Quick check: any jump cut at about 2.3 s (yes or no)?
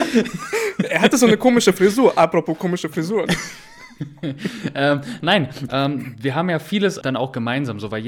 no